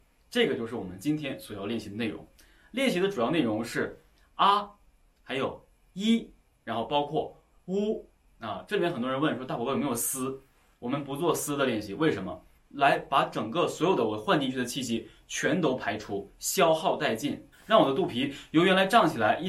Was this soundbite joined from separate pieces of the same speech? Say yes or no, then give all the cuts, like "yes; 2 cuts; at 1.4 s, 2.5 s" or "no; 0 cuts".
yes; 2 cuts; at 12.6 s, 17.5 s